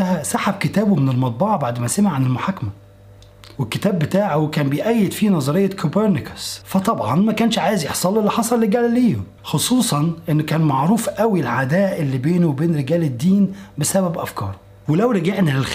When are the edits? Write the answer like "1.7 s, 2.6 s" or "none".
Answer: 3.5 s